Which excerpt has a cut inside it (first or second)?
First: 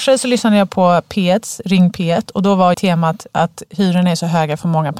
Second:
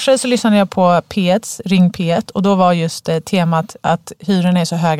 first